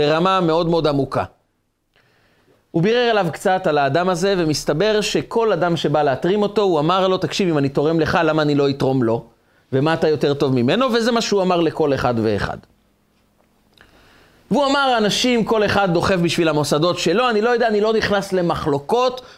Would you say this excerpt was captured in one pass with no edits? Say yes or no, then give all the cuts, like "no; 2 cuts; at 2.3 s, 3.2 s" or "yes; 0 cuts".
yes; 0 cuts